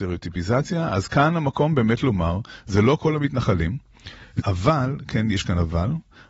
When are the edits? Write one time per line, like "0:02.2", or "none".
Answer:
0:04.4